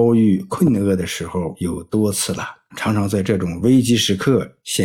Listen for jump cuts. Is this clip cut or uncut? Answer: cut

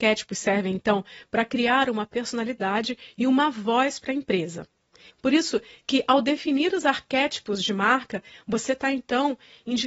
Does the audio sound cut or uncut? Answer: cut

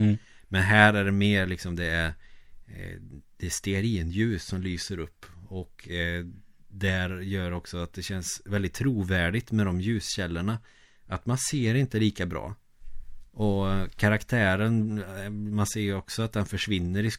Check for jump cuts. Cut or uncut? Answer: uncut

